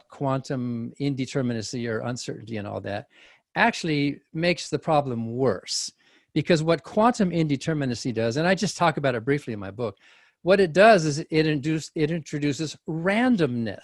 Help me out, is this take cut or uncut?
uncut